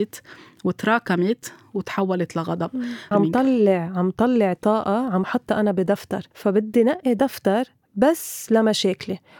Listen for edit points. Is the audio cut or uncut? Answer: cut